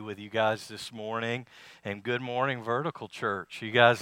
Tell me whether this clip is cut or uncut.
uncut